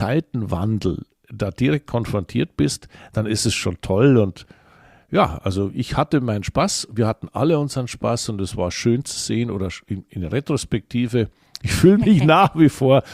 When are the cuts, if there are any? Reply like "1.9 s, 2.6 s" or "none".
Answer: 11.6 s

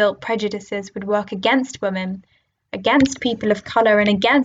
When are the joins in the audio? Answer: none

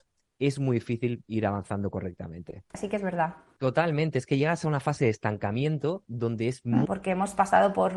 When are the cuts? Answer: 2.7 s, 6.9 s

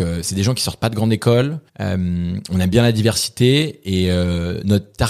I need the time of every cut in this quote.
1.7 s

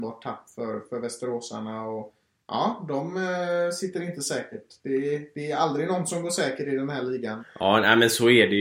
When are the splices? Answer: 7.4 s

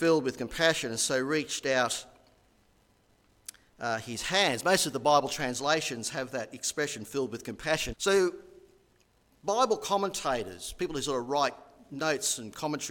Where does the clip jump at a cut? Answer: 7.9 s

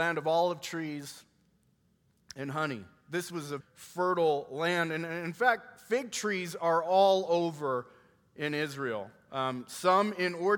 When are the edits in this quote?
3.6 s

